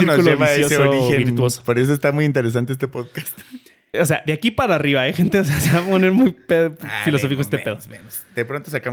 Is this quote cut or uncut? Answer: cut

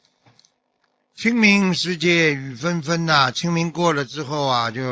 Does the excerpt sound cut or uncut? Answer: uncut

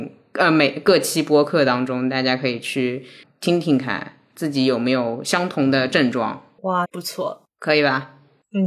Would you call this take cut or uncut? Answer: cut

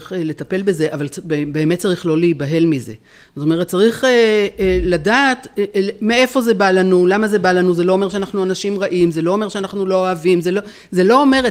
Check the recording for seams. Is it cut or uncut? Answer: uncut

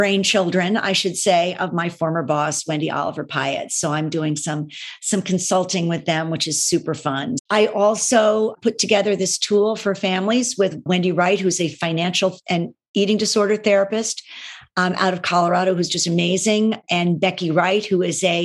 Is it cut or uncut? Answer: cut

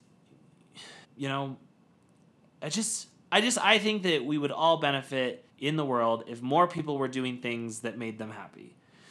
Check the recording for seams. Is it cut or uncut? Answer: cut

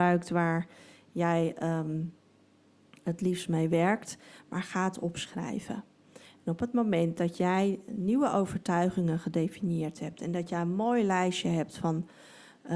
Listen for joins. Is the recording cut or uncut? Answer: cut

